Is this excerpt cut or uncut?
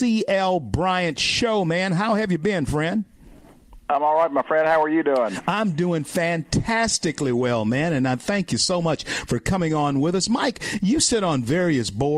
uncut